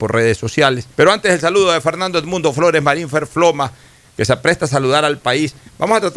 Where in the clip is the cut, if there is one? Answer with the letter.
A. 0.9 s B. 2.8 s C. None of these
A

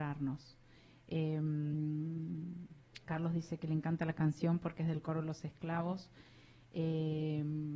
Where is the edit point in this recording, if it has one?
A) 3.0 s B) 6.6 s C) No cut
A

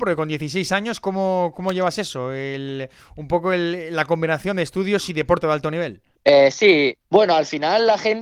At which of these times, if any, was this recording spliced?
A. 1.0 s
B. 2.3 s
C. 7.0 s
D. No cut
C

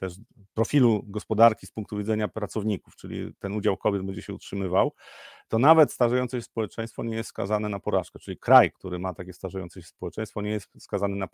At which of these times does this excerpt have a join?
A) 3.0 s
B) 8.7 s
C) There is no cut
B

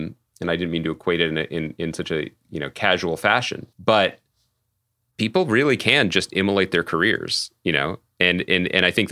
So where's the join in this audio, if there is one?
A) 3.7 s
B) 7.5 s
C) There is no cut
A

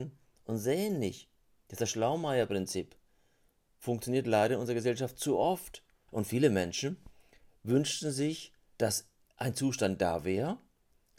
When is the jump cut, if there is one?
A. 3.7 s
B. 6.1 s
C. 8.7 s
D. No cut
B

